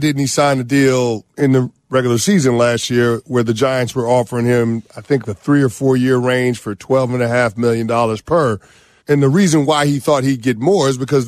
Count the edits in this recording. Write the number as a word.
two